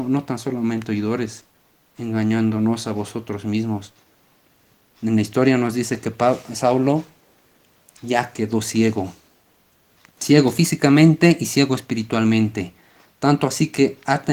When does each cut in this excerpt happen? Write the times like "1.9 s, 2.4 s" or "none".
none